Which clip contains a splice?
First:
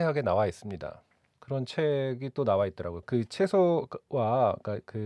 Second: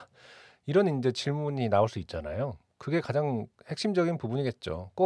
first; 2 cuts; at 1.3 s, 3.0 s

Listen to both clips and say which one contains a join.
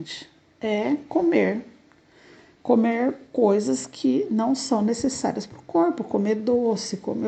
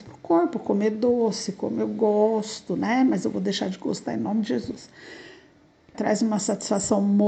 second; 1 cut; at 5.9 s

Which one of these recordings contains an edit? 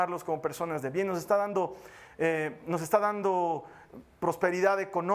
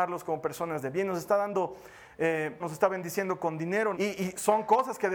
second; 2 cuts; at 2.6 s, 3.9 s

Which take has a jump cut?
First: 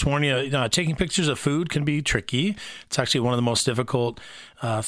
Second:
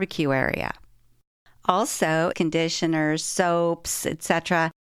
second; 1 cut; at 2.3 s

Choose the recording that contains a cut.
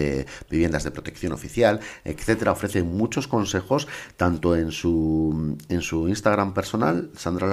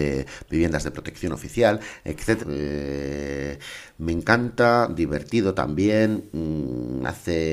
second; 1 cut; at 2.4 s

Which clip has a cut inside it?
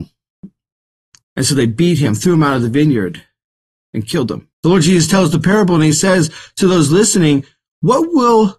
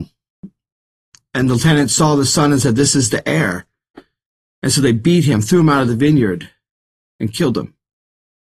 first; 2 cuts; at 1.2 s, 4.5 s

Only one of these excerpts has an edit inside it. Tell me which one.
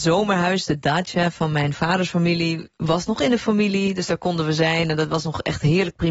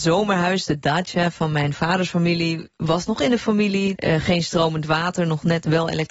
second; 1 cut; at 3.9 s

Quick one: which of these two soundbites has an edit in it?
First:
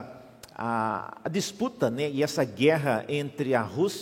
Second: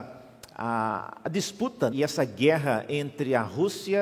second; 1 cut; at 1.9 s

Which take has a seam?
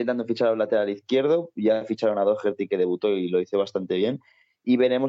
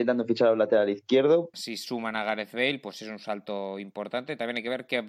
second; 1 cut; at 1.5 s

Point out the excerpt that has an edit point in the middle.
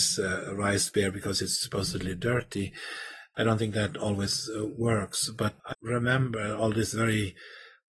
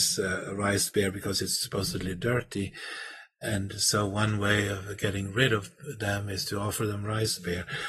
first; 2 cuts; at 3.3 s, 5.7 s

